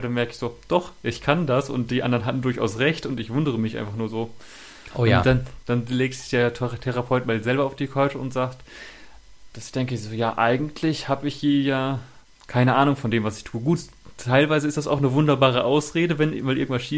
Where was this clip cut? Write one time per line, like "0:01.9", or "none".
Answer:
0:04.9
0:09.5